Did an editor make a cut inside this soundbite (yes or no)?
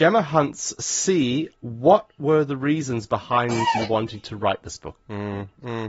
yes